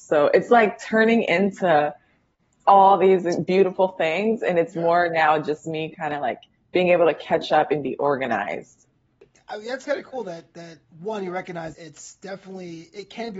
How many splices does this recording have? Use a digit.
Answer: 1